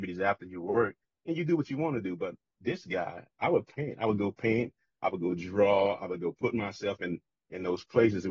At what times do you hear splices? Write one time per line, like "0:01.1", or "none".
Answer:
none